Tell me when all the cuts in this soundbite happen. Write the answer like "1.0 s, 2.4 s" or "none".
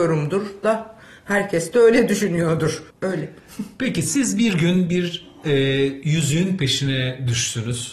2.9 s